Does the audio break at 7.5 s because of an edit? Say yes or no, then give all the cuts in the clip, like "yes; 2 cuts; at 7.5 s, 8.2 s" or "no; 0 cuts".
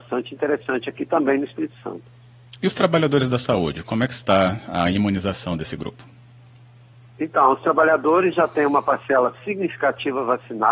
no; 1 cut; at 2.5 s